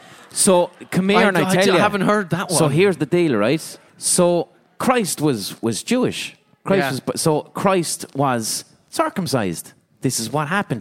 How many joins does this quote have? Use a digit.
1